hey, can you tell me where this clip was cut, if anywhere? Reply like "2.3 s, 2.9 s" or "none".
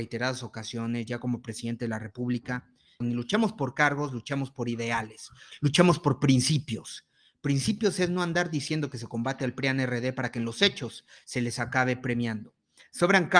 3.0 s